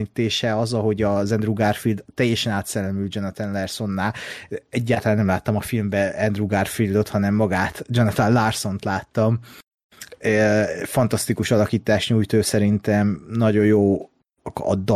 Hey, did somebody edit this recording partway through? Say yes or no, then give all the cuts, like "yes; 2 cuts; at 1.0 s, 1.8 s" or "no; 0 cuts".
no; 0 cuts